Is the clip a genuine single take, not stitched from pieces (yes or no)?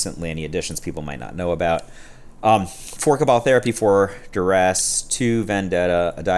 yes